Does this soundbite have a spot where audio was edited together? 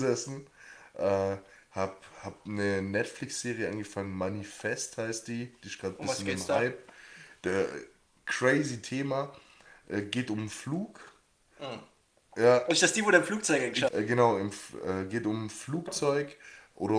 yes; 1 cut; at 13.9 s

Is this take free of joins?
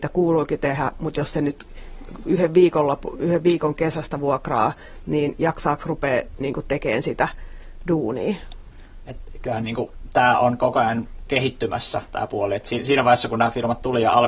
yes; 0 cuts

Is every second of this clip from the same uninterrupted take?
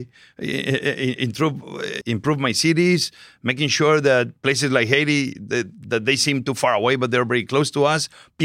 no; 1 cut; at 2.0 s

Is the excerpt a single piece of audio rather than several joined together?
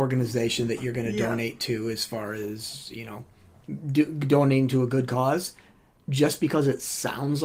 yes; 0 cuts

